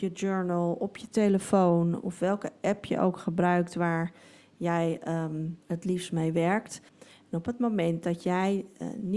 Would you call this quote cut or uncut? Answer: cut